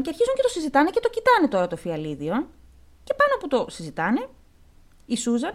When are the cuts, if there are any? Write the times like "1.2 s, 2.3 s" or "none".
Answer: none

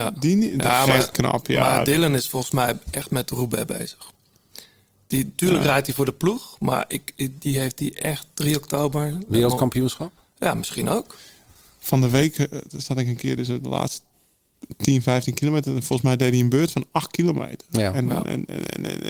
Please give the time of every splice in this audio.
none

